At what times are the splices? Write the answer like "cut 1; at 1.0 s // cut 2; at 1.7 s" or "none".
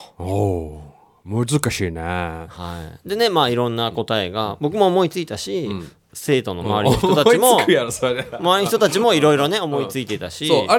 none